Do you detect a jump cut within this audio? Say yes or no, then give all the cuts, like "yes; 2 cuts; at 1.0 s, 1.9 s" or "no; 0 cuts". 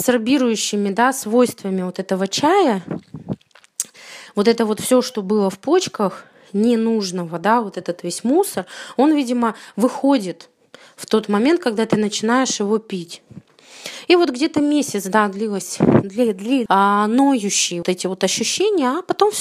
yes; 2 cuts; at 16.7 s, 17.8 s